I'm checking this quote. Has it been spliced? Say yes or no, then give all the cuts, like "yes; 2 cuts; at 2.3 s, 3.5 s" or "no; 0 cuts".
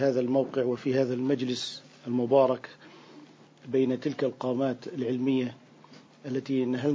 no; 0 cuts